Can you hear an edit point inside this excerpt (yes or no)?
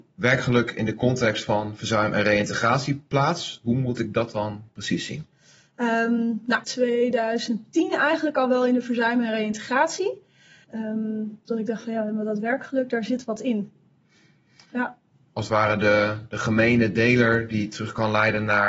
yes